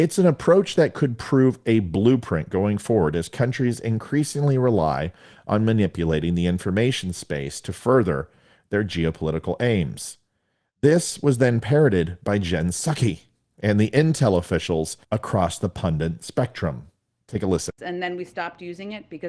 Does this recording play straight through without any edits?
no; 2 cuts; at 15.0 s, 17.8 s

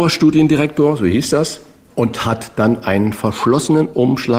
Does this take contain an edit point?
no; 0 cuts

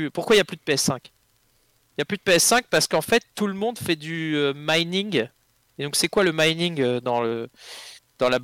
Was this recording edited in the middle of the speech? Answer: no; 0 cuts

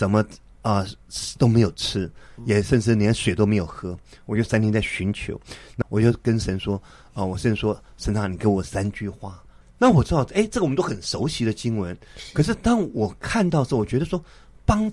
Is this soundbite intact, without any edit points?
no; 2 cuts; at 5.8 s, 9.6 s

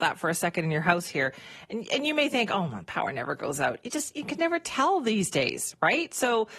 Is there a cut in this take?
no; 0 cuts

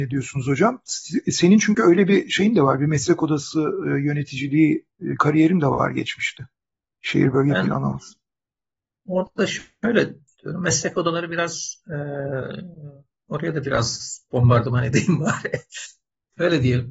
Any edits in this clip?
no; 0 cuts

